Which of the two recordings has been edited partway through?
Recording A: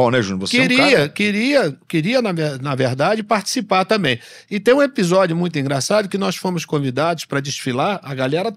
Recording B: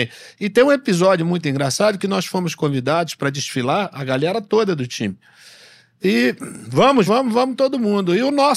B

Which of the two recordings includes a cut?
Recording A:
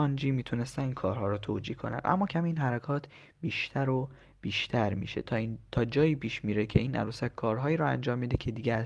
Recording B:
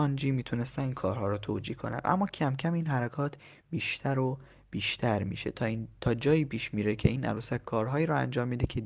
A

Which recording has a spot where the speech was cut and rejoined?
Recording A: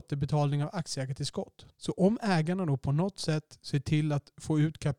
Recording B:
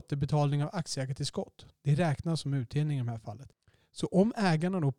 A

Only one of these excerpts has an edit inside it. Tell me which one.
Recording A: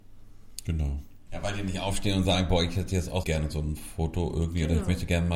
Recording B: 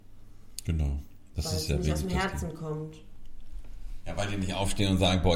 A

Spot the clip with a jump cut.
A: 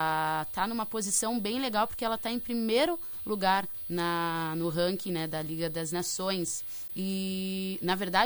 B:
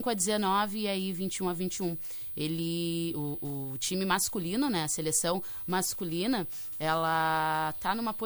A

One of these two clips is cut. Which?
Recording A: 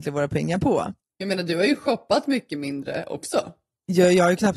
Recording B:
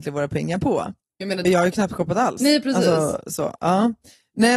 B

